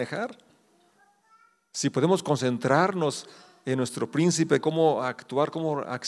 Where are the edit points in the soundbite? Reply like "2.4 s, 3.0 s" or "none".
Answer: 4.6 s